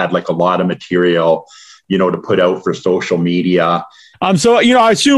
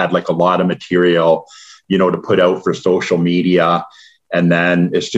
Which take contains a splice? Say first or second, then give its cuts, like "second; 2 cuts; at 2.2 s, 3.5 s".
first; 1 cut; at 4.1 s